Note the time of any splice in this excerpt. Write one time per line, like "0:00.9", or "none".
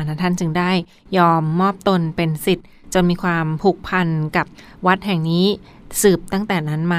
none

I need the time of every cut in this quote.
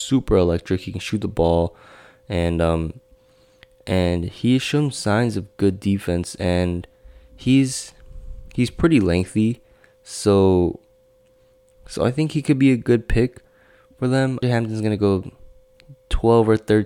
0:14.4

